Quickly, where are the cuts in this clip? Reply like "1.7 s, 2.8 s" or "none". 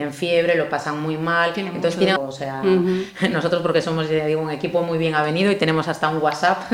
2.2 s

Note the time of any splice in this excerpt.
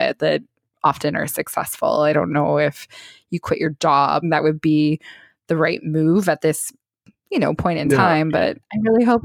4.2 s

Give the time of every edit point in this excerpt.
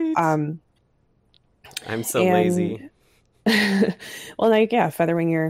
none

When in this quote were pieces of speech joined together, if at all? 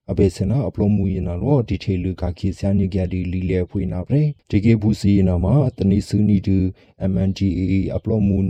4.4 s

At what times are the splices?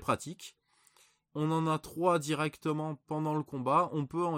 1.3 s

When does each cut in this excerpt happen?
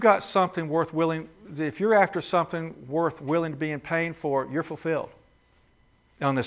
none

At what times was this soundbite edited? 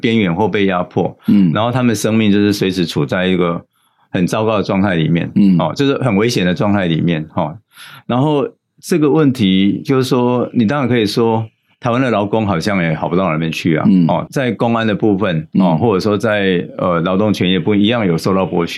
14.3 s

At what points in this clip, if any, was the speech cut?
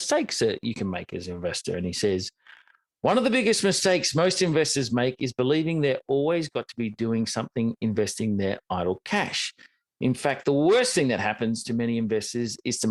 none

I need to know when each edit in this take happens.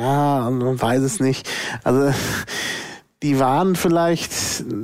none

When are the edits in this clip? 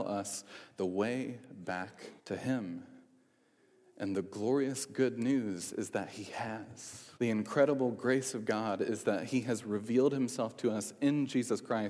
2.2 s, 7.1 s

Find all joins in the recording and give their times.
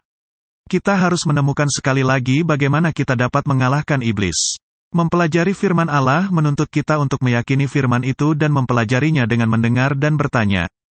none

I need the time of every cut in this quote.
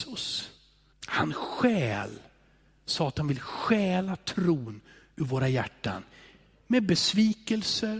0.9 s

